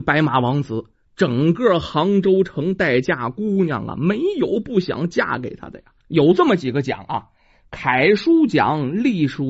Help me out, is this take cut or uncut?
cut